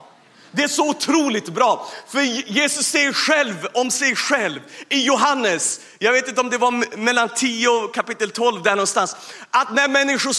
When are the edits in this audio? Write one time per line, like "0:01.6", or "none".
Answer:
none